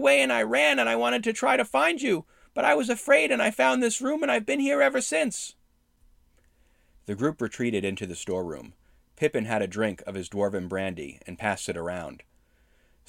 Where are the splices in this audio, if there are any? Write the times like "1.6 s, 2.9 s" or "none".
none

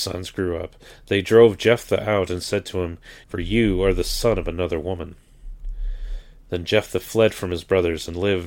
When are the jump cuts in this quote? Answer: 3.2 s

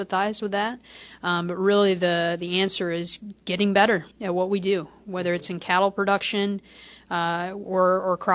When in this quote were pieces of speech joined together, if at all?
4.1 s

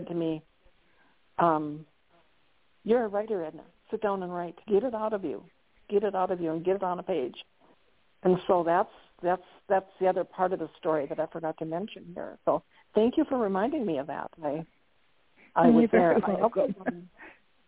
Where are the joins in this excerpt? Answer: 4.6 s

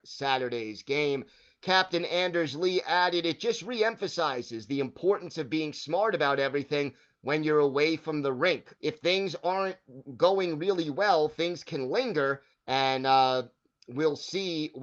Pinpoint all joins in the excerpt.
8.8 s, 12.5 s

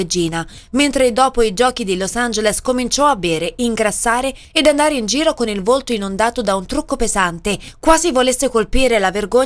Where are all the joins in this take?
none

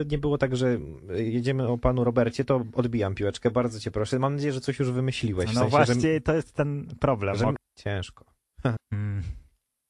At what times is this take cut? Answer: 7.6 s, 8.8 s

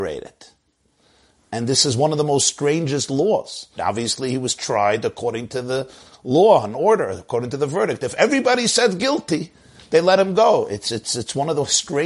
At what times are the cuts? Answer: 3.8 s

